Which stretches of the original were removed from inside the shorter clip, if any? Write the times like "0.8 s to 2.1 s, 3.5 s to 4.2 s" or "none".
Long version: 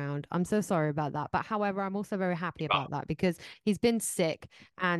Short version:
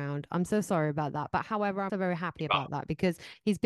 1.9 s to 2.1 s